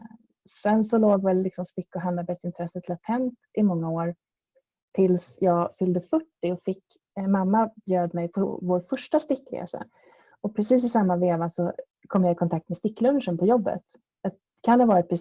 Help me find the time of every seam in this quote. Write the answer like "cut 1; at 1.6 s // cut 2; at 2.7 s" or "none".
cut 1; at 8.3 s